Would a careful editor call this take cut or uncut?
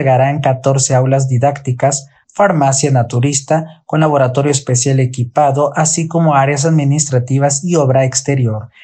uncut